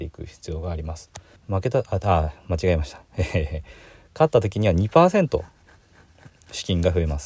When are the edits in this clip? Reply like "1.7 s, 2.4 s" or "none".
1.4 s